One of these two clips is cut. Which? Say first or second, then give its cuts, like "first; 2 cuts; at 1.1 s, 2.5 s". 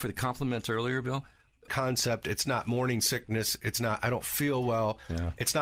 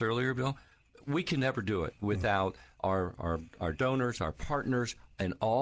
first; 1 cut; at 1.7 s